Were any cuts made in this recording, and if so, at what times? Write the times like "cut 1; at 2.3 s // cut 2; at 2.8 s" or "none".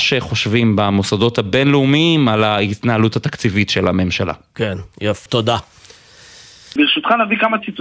cut 1; at 5.3 s // cut 2; at 6.8 s